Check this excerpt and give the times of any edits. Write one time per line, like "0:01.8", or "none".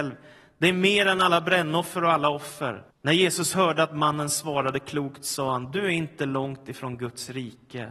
0:02.9